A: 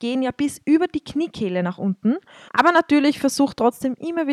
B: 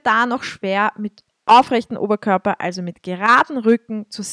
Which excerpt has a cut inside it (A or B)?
A